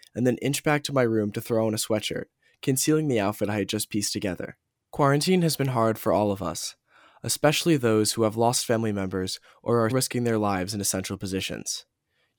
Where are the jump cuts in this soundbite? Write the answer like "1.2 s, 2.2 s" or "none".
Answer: 4.7 s, 9.9 s